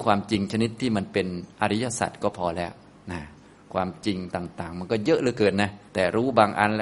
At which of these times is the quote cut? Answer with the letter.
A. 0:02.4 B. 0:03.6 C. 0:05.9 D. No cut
C